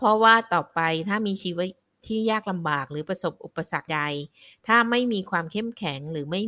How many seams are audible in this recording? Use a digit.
1